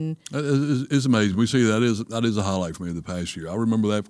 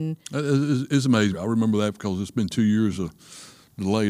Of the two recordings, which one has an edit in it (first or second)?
second